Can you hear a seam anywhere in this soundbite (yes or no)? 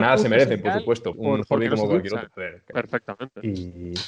yes